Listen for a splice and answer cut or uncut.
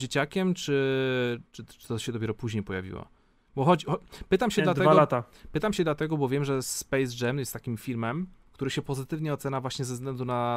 uncut